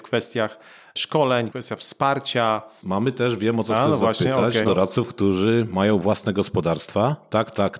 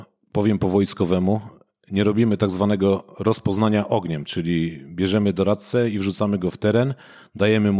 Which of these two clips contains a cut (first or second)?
first